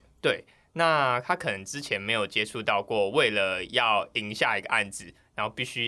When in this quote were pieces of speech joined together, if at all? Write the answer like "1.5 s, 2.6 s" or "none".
none